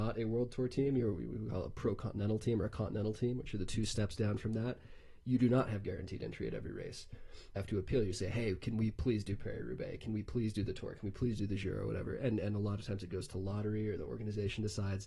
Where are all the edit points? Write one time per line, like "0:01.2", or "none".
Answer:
0:07.6